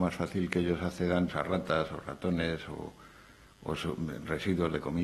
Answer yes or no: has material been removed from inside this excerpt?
yes